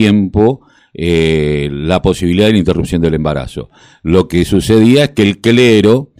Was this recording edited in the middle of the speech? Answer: no; 0 cuts

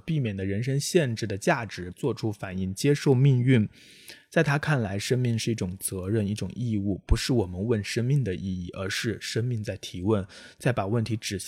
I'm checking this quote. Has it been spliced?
yes; 1 cut; at 1.9 s

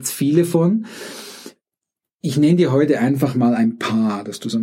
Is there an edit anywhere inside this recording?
no; 0 cuts

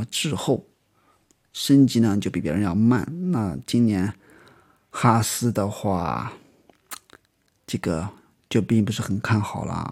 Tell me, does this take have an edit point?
no; 0 cuts

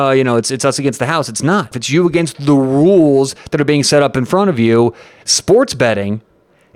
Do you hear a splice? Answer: yes; 2 cuts; at 1.7 s, 5.2 s

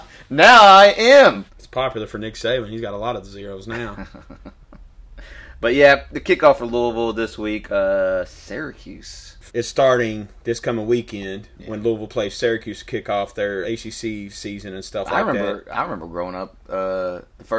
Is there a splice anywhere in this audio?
yes; 3 cuts; at 1.5 s, 9.5 s, 13.6 s

